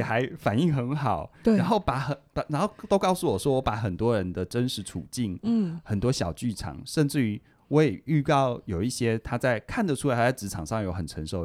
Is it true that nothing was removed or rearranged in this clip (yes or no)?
yes